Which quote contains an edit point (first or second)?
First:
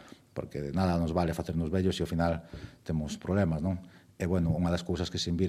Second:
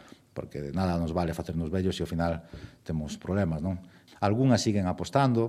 second